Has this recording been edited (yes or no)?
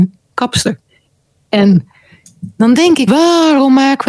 yes